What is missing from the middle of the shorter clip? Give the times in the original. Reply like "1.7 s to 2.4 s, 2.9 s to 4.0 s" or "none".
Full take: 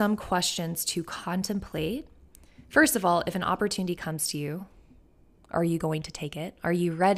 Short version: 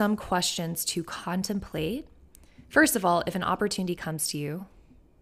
none